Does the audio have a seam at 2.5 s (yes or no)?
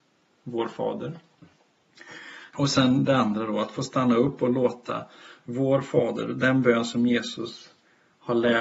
yes